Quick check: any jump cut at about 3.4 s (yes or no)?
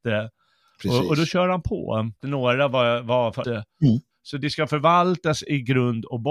yes